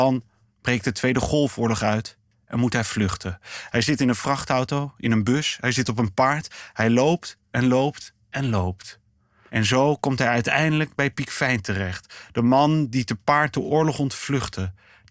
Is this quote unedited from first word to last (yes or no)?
no